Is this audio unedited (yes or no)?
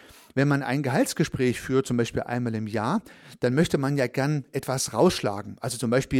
yes